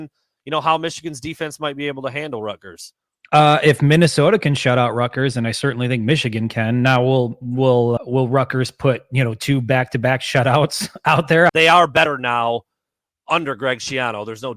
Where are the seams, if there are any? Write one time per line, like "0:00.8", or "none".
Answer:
0:08.0
0:11.5